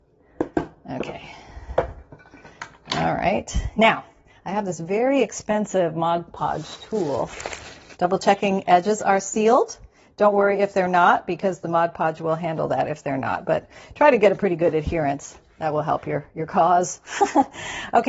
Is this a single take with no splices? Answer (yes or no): no